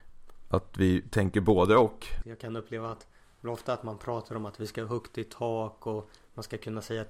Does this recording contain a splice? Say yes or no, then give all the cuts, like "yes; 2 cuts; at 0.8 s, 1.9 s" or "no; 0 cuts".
yes; 1 cut; at 2.2 s